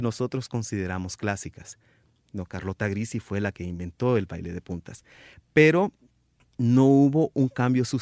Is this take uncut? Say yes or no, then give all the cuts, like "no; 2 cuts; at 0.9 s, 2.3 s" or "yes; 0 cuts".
no; 1 cut; at 2.2 s